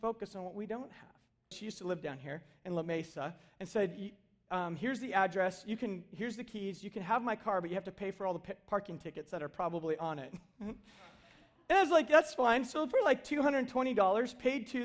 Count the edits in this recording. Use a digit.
1